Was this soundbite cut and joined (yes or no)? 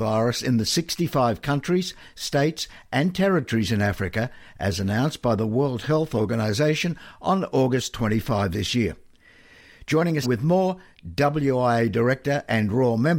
yes